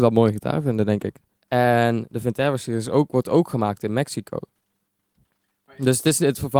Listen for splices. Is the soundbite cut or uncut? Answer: cut